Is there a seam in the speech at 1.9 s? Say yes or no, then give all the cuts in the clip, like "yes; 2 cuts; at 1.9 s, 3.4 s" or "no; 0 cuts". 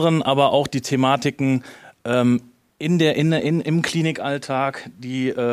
no; 0 cuts